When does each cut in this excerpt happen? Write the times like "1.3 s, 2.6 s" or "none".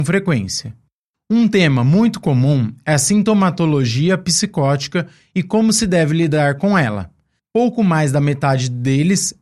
7.4 s